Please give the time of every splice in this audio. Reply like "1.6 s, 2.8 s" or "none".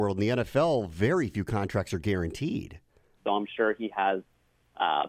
3.2 s